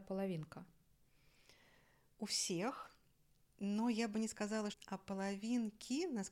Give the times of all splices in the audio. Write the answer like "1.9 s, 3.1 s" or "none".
4.7 s